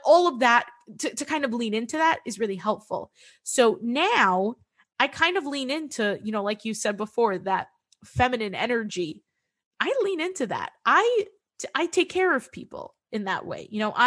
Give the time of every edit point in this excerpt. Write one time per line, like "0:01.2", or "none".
none